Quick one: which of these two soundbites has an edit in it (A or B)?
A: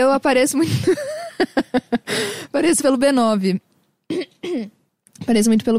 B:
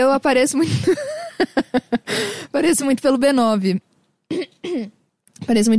A